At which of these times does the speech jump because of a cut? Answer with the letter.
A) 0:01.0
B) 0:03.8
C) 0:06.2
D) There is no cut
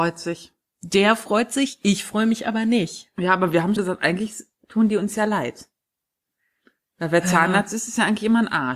B